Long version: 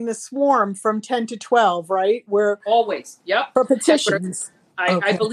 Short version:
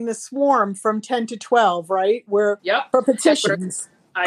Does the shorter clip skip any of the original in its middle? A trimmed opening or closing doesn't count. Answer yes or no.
yes